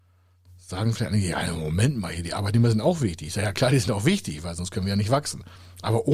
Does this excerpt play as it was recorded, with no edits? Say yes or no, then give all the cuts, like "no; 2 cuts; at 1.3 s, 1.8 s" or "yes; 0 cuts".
yes; 0 cuts